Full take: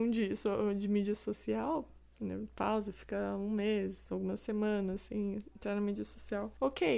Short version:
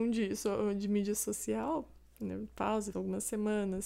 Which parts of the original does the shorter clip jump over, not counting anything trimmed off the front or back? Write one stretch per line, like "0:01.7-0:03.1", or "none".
0:02.9-0:04.1